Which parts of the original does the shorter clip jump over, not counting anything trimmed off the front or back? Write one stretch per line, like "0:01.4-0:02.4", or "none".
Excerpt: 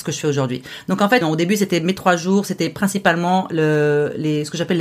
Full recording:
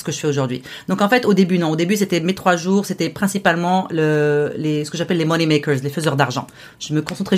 0:01.2-0:01.6